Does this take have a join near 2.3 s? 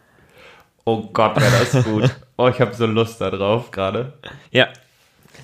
no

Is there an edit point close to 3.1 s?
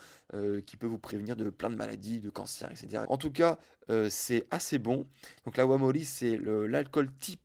yes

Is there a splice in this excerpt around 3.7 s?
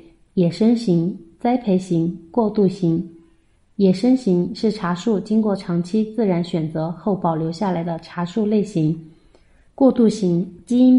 no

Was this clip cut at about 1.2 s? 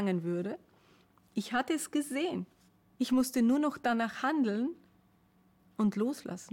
no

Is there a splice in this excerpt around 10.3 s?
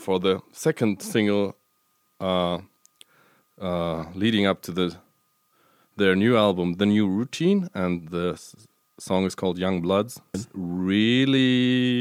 yes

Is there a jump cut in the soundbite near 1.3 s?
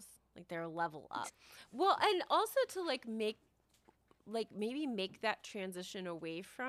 yes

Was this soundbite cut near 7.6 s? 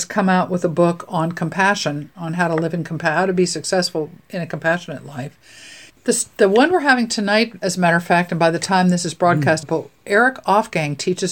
no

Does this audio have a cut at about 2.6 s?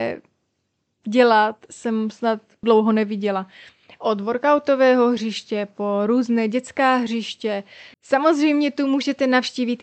yes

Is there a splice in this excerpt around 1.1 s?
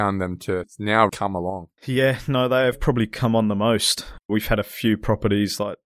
yes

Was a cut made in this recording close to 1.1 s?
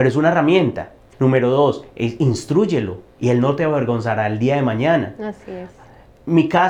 yes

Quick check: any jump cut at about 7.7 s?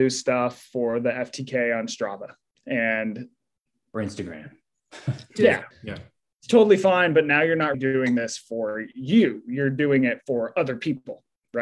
yes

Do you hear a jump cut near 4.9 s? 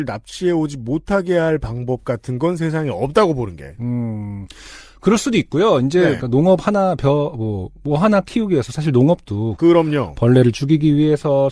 no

